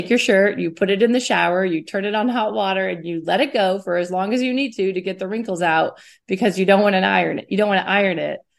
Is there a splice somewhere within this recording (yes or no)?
no